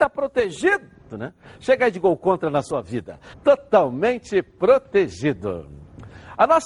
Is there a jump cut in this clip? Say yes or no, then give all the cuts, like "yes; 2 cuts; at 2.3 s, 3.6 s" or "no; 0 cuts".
yes; 2 cuts; at 1.1 s, 3.3 s